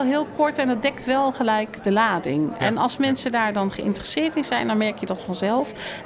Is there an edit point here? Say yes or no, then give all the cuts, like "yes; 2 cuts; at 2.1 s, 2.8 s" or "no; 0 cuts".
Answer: no; 0 cuts